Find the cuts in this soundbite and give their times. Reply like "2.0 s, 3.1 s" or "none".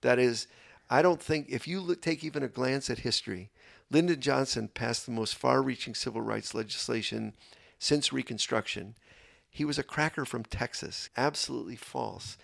11.1 s